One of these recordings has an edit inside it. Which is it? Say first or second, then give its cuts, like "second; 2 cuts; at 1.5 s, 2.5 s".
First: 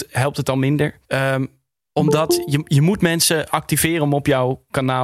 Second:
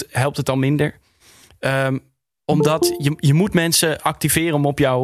first; 1 cut; at 1.0 s